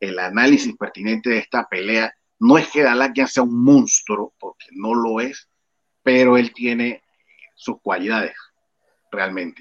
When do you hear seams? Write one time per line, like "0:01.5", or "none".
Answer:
0:06.5